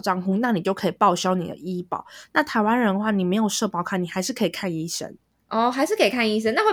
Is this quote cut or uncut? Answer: uncut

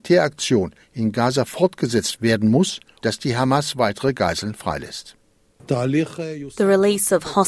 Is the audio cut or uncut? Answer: cut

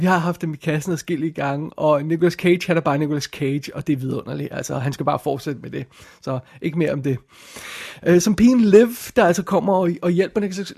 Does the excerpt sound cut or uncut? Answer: uncut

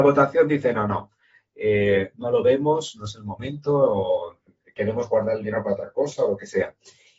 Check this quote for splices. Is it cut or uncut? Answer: uncut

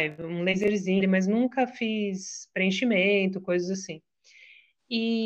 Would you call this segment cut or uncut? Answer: cut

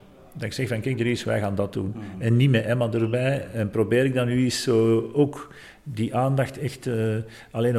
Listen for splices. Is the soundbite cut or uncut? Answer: uncut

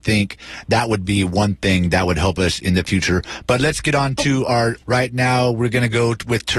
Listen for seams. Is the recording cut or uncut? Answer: cut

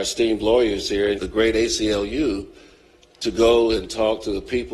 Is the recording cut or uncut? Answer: cut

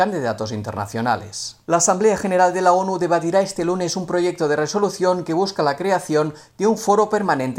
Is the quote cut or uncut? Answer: cut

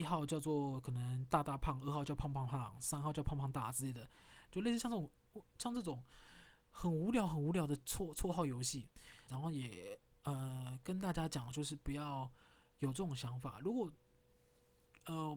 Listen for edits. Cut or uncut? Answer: cut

